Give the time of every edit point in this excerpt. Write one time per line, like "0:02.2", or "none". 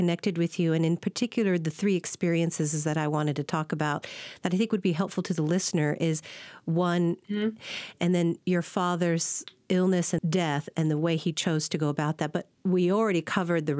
0:07.2
0:10.2
0:12.6